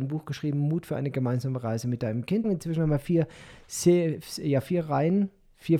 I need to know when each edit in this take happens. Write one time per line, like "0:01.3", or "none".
0:02.4